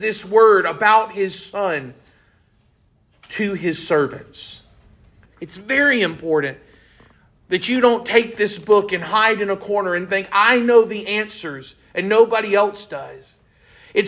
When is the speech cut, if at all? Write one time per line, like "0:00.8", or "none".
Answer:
0:05.2